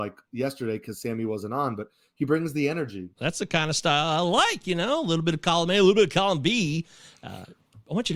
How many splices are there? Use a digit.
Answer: 1